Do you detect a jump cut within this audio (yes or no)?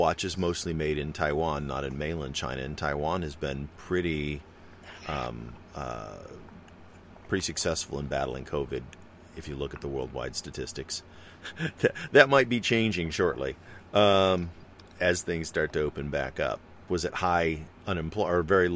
yes